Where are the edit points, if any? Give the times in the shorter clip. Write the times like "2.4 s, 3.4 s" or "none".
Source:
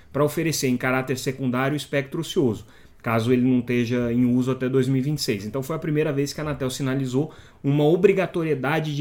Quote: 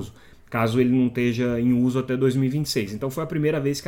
none